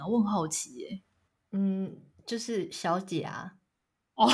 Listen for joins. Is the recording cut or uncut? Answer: uncut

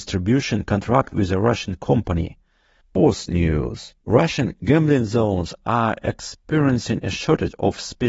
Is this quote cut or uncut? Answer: cut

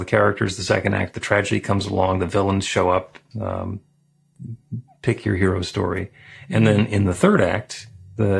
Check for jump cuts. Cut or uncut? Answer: cut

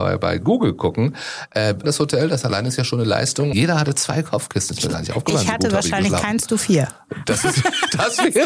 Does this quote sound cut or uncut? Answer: cut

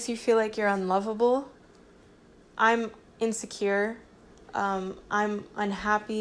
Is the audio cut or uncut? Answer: uncut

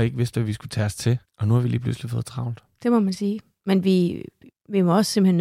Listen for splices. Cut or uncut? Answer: cut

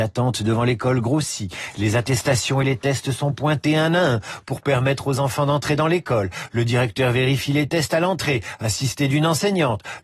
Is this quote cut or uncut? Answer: uncut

